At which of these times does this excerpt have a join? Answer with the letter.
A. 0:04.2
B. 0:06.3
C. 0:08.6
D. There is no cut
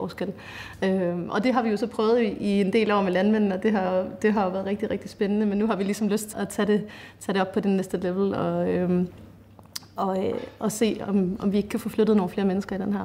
B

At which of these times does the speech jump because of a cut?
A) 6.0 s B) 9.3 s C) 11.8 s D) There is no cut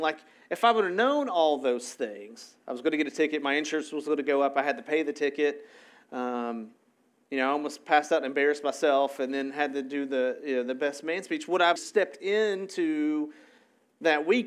C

